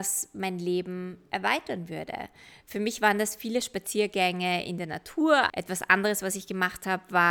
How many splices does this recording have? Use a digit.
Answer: 1